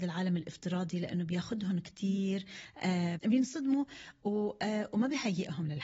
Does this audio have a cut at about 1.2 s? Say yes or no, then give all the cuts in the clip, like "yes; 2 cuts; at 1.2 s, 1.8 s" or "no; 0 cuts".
no; 1 cut; at 3.2 s